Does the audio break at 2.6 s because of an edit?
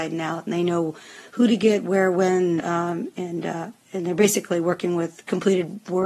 yes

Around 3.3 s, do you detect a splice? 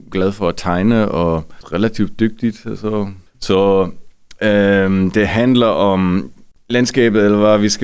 yes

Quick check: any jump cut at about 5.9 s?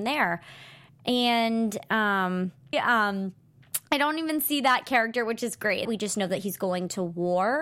yes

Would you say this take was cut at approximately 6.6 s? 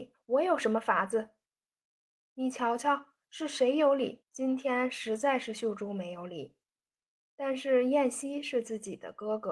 no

